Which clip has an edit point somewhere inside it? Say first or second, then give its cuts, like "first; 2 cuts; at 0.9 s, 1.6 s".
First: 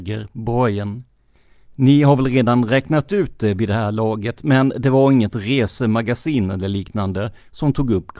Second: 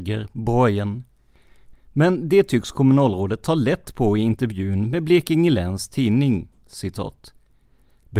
second; 1 cut; at 1.7 s